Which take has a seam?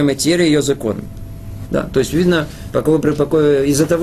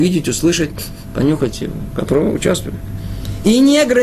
first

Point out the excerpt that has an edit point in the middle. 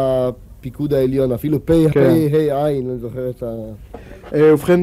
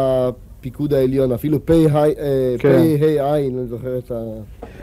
first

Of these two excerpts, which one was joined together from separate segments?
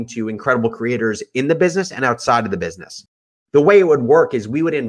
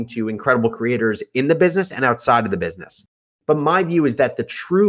first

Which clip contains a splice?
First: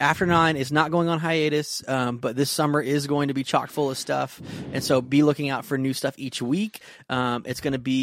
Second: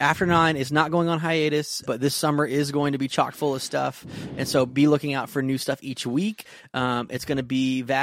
second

